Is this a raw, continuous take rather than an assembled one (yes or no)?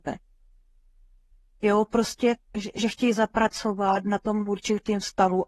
no